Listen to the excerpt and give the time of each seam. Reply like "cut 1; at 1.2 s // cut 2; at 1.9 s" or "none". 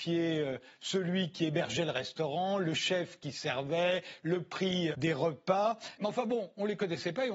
cut 1; at 4.9 s // cut 2; at 6.0 s